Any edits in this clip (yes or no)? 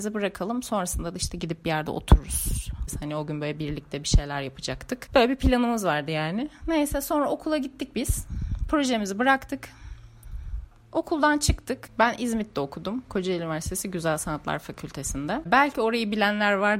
no